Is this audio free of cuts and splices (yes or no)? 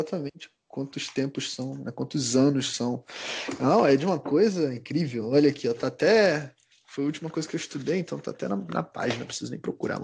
yes